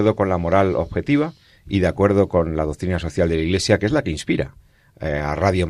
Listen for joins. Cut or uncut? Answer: uncut